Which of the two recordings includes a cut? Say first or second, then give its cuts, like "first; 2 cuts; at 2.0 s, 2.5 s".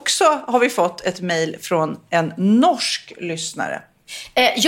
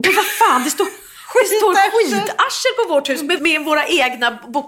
second; 1 cut; at 3.4 s